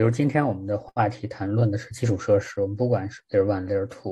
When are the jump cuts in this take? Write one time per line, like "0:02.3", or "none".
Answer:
0:03.2